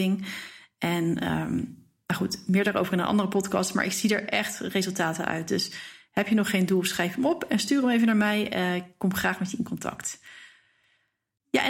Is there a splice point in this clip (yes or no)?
no